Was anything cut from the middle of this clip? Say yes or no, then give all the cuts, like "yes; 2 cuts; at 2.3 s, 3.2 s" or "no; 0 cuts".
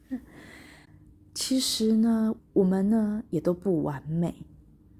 yes; 1 cut; at 2.4 s